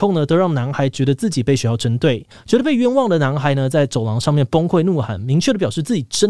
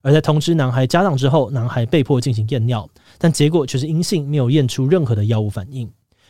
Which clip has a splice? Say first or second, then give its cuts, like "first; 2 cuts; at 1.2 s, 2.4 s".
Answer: first; 1 cut; at 2.3 s